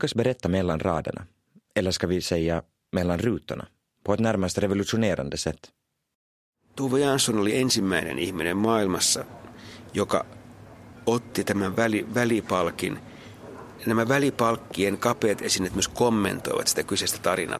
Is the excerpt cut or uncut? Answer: cut